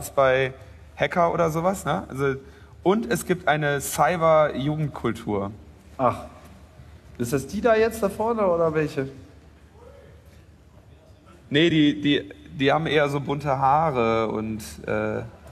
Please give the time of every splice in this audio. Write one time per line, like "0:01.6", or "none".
none